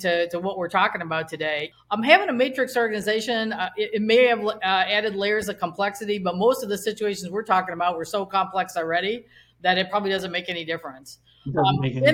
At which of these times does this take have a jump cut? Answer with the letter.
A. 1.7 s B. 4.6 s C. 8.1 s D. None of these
A